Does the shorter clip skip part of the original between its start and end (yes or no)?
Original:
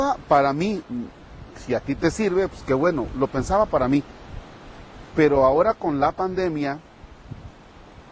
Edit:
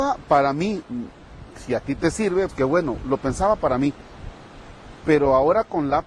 yes